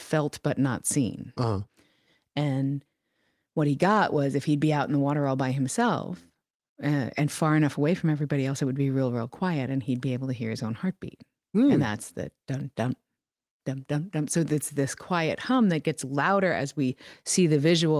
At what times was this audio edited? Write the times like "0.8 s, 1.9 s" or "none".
none

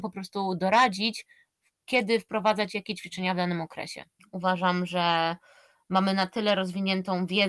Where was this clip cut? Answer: 4.2 s

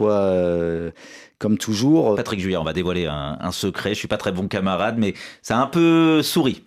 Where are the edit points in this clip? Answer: 2.1 s

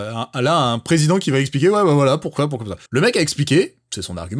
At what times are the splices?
2.9 s

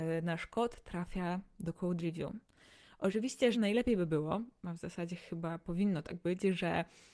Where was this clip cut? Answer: 3.5 s

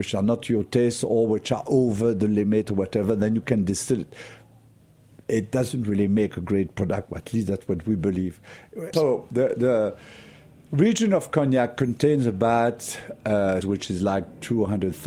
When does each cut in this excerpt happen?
8.9 s, 13.6 s

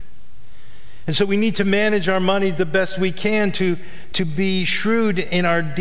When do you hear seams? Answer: 4.1 s

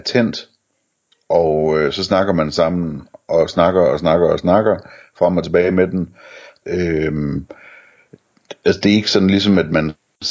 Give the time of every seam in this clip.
6.6 s

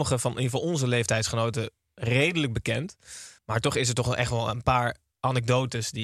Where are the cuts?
3.4 s

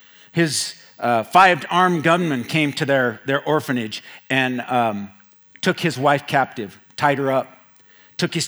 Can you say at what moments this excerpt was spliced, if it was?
none

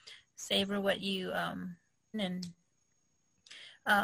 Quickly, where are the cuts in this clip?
2.1 s

